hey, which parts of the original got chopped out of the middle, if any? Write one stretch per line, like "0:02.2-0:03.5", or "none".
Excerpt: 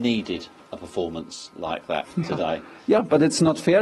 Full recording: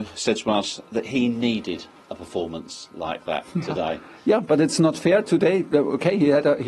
none